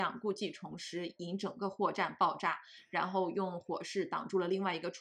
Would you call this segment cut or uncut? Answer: uncut